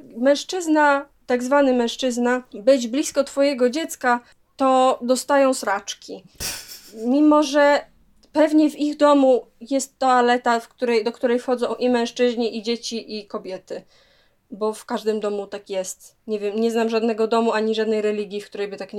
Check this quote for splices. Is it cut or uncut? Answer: uncut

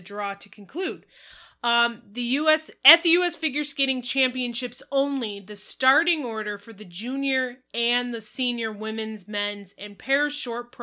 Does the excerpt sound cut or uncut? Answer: uncut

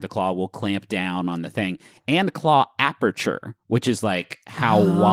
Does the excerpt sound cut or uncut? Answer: uncut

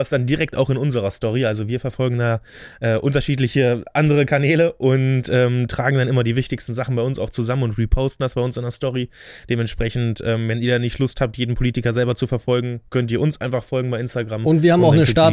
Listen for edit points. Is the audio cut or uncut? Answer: uncut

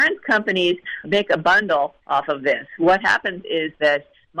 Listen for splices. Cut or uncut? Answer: cut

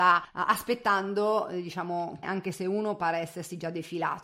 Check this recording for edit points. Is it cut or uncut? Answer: cut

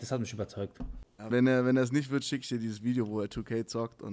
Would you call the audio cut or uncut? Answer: cut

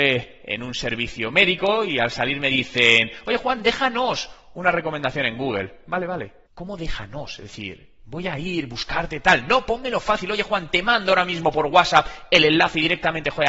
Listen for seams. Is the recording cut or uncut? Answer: cut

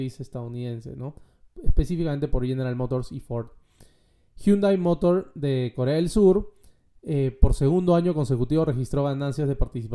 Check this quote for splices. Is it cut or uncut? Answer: uncut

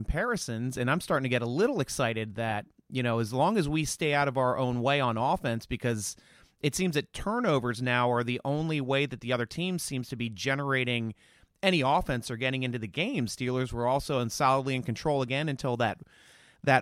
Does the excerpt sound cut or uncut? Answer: cut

